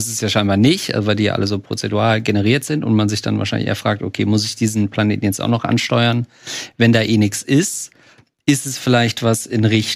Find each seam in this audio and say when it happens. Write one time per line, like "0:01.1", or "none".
none